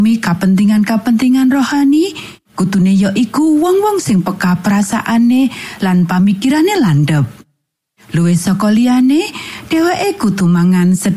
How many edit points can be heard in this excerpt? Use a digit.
0